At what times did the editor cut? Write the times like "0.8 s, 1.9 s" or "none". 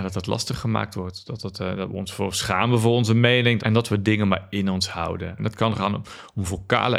3.6 s, 5.4 s